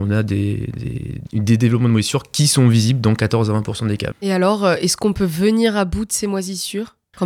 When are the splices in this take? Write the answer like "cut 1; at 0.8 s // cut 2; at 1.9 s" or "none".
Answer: cut 1; at 4.1 s